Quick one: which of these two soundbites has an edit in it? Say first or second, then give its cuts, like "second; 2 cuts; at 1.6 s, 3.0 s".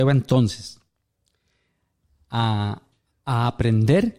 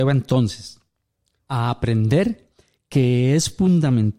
second; 1 cut; at 1.4 s